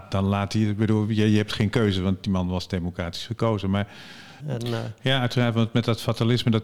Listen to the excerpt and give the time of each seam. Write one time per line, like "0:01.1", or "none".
0:04.4